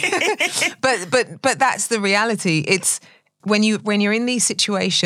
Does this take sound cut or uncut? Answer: uncut